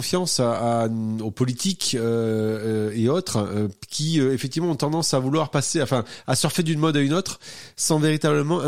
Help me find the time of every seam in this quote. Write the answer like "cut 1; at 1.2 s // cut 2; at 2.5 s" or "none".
none